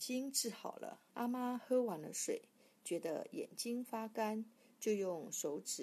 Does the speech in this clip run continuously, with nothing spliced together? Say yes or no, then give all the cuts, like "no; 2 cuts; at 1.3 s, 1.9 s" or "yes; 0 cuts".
no; 1 cut; at 1.1 s